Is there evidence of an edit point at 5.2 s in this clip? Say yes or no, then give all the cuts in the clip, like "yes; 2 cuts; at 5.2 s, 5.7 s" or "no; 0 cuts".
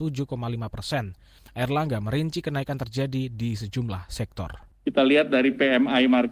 no; 1 cut; at 1.4 s